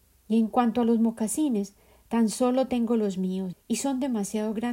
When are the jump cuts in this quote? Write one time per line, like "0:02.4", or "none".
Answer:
0:03.5